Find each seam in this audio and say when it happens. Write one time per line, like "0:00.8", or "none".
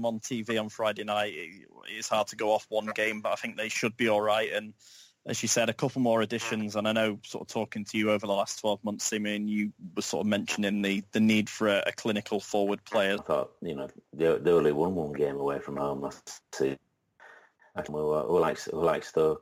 0:13.2
0:17.9